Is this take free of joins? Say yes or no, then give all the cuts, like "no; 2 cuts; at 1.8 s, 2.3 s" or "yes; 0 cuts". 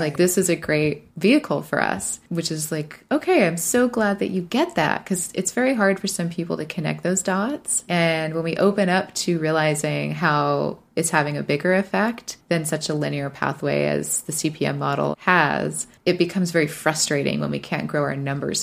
no; 2 cuts; at 7.9 s, 15.1 s